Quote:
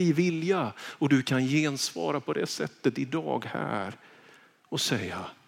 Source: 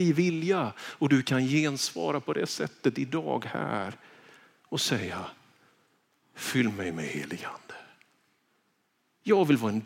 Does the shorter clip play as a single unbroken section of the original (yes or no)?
yes